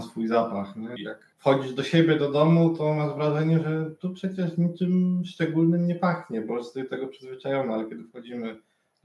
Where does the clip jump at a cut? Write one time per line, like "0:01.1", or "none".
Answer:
0:01.0